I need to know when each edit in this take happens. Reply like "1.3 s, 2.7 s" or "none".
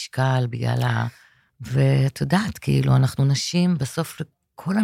1.5 s